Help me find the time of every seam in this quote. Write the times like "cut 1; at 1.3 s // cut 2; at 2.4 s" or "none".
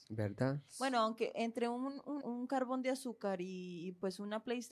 cut 1; at 2.2 s